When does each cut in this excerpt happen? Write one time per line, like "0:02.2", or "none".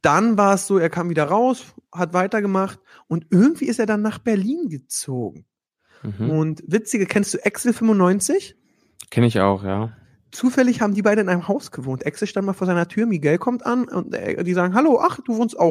none